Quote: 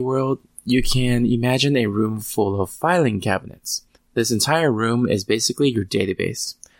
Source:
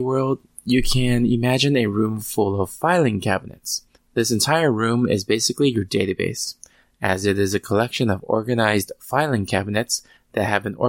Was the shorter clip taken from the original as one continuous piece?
yes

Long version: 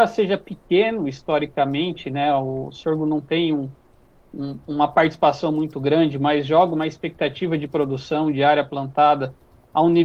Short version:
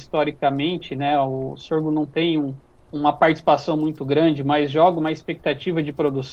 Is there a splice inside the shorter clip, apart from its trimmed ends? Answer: yes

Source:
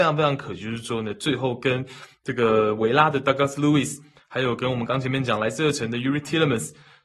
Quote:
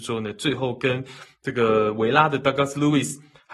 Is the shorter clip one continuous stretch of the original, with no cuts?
yes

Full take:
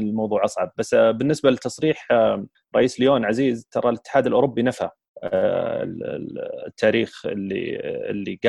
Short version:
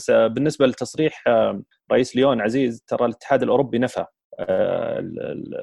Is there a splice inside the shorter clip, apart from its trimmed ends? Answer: no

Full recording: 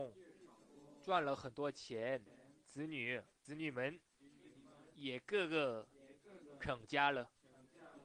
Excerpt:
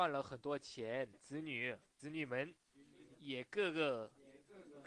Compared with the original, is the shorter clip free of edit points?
no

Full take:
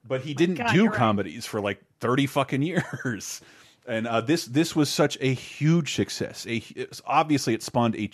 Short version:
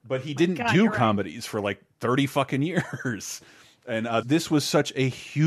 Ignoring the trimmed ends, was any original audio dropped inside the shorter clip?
yes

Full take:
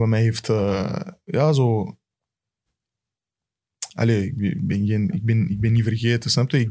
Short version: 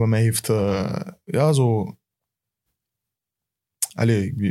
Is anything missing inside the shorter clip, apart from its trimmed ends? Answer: no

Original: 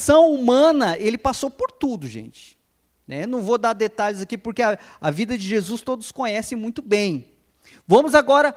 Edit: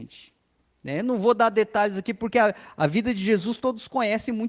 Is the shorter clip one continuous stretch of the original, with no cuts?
yes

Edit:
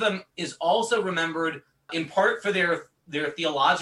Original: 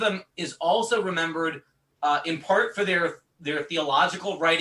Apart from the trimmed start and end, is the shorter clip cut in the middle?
yes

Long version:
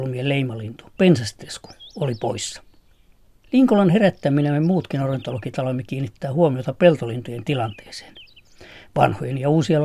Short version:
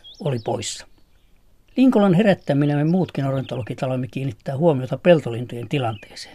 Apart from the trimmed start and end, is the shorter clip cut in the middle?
no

